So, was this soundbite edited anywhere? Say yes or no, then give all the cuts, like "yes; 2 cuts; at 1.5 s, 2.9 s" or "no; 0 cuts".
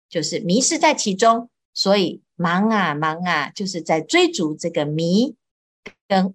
no; 0 cuts